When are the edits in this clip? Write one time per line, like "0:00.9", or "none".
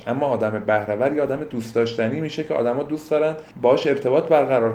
0:03.5